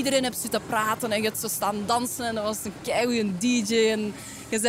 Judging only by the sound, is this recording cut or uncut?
uncut